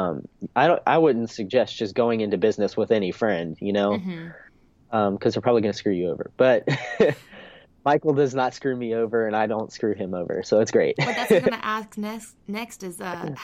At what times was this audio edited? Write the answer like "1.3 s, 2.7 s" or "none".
none